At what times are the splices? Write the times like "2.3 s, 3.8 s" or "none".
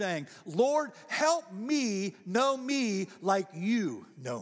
none